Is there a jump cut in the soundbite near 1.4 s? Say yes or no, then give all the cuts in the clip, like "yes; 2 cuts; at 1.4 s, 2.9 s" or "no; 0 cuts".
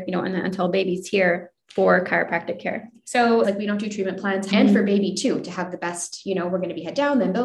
no; 2 cuts; at 3.4 s, 4.5 s